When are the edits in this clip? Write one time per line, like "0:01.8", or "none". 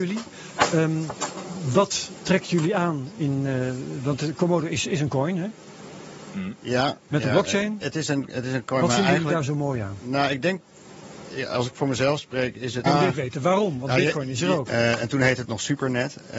0:07.8
0:12.9
0:14.7